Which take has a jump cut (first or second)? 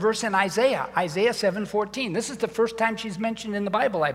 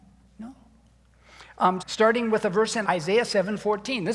second